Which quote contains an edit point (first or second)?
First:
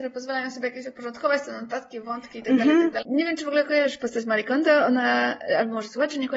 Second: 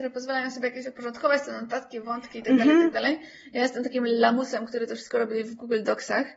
first